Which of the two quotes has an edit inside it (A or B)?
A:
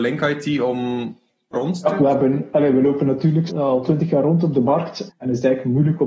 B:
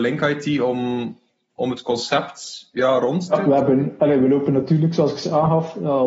A